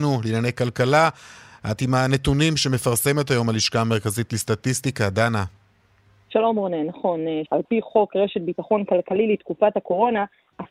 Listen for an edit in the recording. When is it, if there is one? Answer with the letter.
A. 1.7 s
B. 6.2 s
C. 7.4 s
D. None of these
C